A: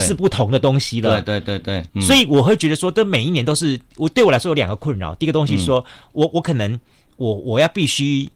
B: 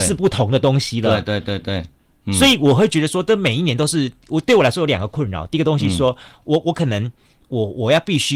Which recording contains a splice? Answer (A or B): A